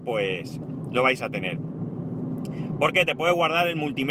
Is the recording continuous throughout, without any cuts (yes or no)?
yes